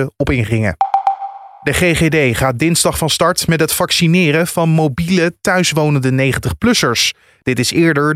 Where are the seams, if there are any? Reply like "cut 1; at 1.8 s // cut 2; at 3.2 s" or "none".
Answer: none